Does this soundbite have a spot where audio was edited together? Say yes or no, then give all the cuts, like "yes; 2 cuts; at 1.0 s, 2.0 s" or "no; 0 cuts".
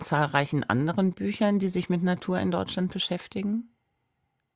no; 0 cuts